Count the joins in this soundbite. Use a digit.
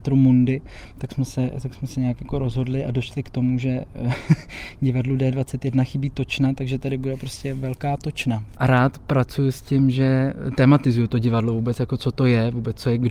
1